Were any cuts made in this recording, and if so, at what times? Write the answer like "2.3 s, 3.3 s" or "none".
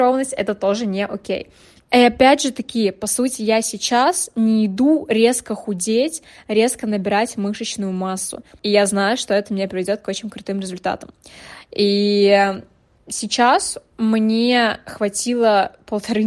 1.8 s, 8.6 s